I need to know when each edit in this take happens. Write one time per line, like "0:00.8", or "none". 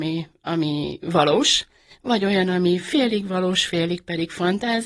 none